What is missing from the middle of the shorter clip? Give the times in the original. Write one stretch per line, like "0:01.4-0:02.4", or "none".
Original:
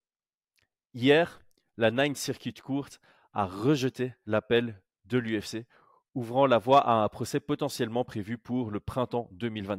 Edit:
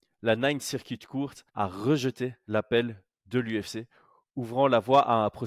0:03.0-0:03.3

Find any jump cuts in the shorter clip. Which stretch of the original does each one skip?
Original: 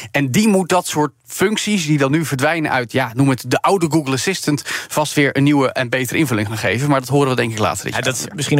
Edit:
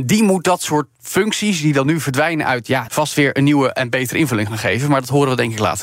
0:03.1-0:04.9

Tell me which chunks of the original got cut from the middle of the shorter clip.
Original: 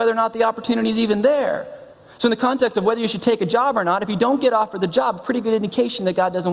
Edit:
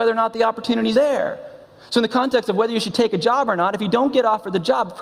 0:00.9-0:01.2

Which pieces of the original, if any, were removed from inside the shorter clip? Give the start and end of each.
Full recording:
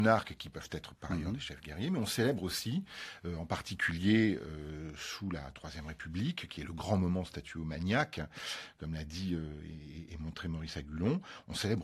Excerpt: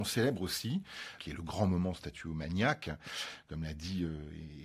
0:03.2-0:06.5

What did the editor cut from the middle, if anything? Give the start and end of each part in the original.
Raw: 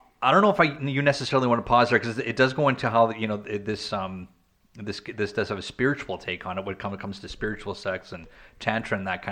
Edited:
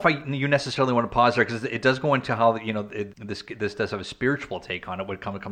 0:03.6-0:04.7

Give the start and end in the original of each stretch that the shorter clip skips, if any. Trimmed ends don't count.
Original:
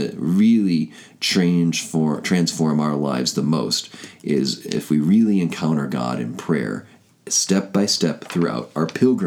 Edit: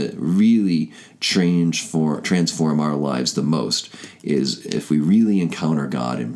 none

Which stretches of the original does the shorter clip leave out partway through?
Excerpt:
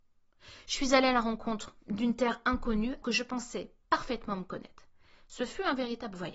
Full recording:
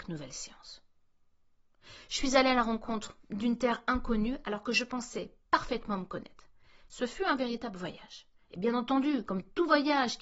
0:04.4-0:04.6

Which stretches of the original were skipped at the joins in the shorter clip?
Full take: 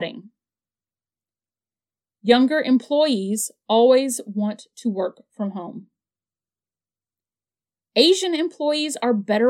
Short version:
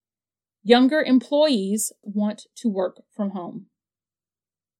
0:03.6-0:04.2

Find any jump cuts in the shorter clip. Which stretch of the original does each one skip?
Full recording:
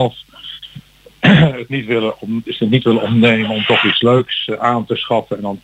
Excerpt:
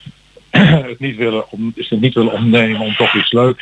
none

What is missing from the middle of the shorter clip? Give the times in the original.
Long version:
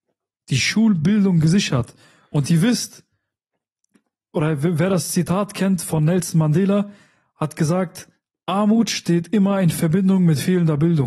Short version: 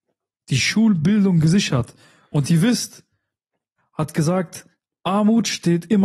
0:03.8-0:07.2

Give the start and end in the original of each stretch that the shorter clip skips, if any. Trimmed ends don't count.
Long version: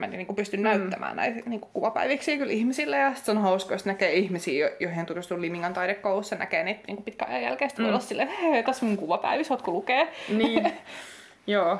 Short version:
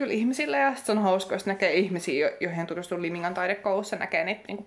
none

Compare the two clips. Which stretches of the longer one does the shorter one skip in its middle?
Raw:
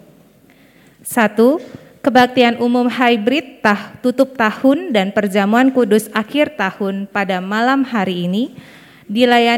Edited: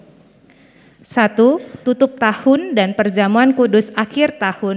0:01.8-0:04.0

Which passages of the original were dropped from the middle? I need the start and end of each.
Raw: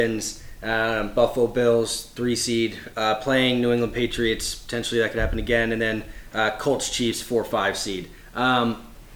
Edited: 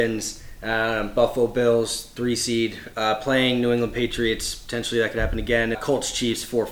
0:05.7-0:06.5

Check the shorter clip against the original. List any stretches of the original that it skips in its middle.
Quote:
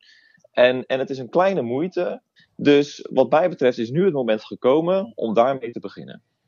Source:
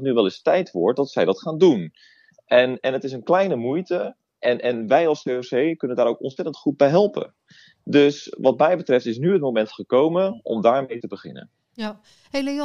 0:04.3-0:07.6

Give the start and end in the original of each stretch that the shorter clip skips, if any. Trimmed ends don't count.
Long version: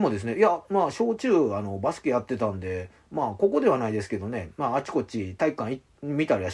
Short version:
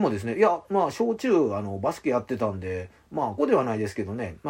0:03.4-0:03.5

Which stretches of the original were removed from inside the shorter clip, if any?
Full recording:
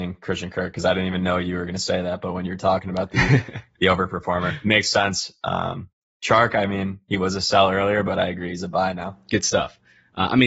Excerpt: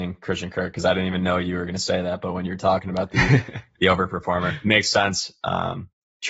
none

